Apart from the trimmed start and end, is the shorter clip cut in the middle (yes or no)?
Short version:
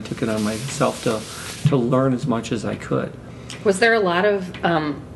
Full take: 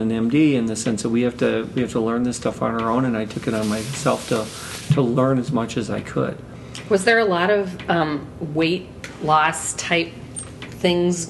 no